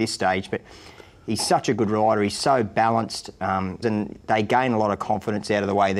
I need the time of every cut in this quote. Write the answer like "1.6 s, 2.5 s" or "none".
3.8 s